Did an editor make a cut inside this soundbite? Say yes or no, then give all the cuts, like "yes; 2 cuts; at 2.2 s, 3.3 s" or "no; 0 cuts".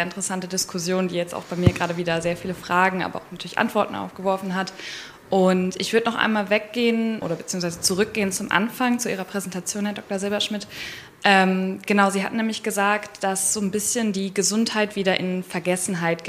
yes; 1 cut; at 7.2 s